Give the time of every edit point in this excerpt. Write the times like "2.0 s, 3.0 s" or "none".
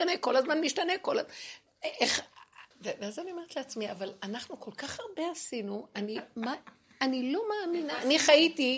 2.7 s